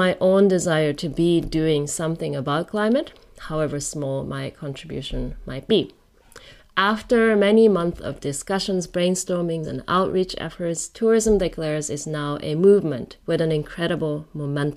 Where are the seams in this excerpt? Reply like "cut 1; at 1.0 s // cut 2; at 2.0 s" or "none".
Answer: cut 1; at 9.6 s // cut 2; at 13.2 s